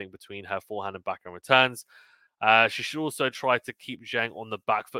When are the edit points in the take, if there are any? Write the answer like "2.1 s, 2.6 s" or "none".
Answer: none